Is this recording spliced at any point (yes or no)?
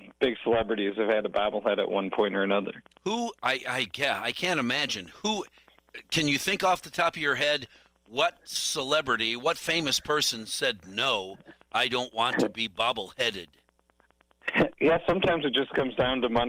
no